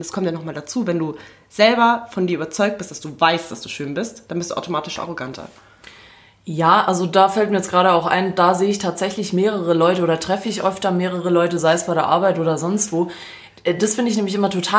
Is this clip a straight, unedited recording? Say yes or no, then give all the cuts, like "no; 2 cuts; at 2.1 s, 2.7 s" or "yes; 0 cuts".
yes; 0 cuts